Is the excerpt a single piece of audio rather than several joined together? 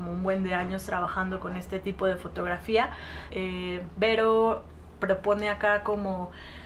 no; 1 cut; at 3.3 s

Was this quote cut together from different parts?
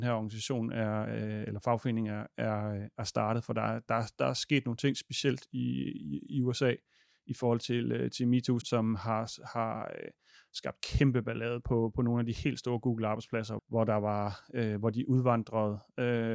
yes; 2 cuts; at 8.6 s, 13.6 s

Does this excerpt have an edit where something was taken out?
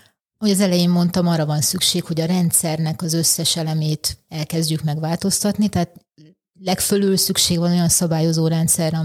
no; 0 cuts

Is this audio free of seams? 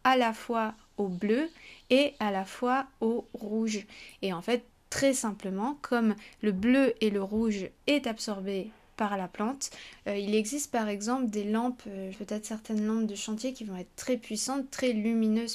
no; 2 cuts; at 10.0 s, 12.1 s

